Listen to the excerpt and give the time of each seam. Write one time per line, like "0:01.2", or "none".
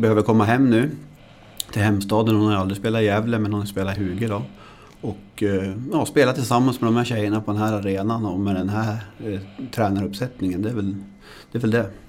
none